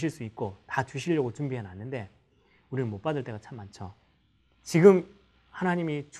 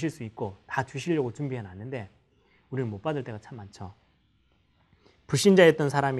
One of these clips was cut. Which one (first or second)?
first